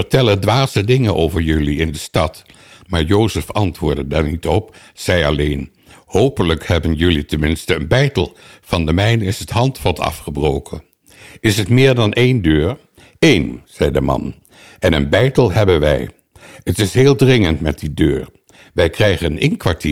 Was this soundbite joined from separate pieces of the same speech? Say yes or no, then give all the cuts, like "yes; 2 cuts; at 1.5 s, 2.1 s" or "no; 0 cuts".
no; 0 cuts